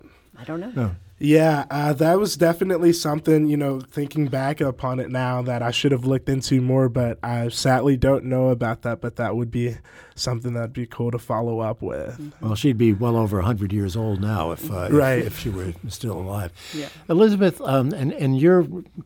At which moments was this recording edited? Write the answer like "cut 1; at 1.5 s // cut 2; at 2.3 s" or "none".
none